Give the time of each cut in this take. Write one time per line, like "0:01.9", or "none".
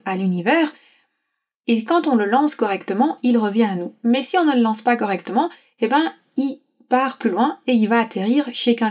none